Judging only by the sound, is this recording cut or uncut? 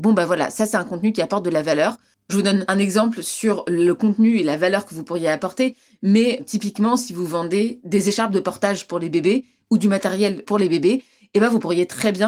cut